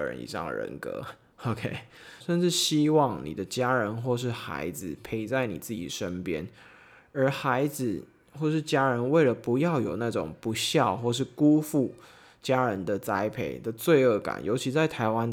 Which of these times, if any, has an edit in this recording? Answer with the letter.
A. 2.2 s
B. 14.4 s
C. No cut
A